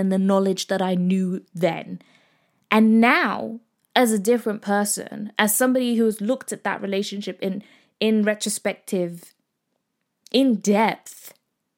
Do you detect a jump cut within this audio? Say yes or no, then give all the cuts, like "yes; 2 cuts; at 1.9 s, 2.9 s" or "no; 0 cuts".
no; 0 cuts